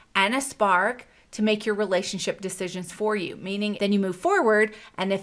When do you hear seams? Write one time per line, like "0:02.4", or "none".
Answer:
0:03.8